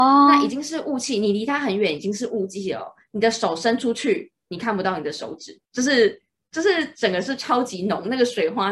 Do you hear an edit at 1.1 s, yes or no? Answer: no